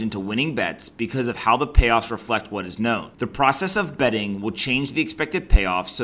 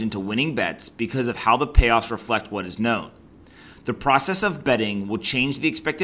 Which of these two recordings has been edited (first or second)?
first